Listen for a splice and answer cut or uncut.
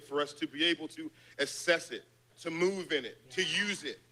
cut